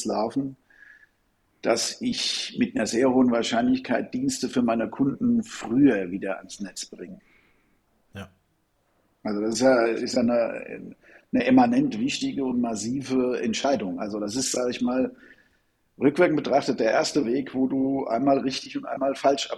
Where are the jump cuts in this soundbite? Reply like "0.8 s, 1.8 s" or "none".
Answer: none